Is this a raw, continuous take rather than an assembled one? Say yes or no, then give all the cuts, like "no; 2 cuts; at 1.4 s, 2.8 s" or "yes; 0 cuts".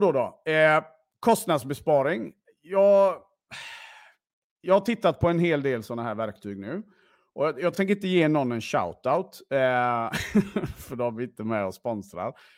yes; 0 cuts